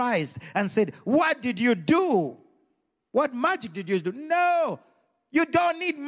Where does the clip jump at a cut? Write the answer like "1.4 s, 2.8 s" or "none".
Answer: none

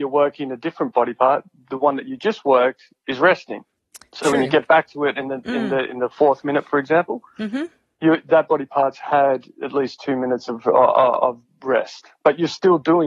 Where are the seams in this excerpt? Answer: none

